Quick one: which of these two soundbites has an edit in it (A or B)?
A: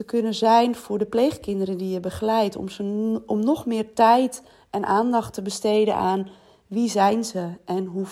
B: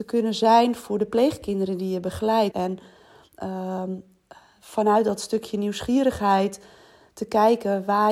B